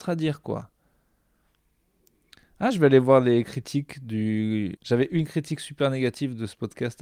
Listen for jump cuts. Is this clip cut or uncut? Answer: cut